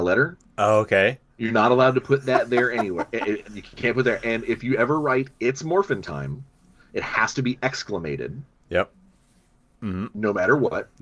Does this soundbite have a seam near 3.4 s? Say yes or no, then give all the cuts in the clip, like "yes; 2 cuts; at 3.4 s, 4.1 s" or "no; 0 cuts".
yes; 2 cuts; at 1.3 s, 3.4 s